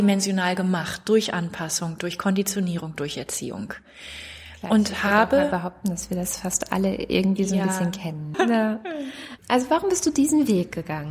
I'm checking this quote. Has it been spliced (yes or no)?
yes